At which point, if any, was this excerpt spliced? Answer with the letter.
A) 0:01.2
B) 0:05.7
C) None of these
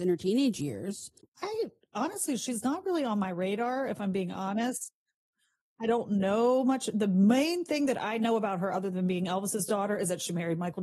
A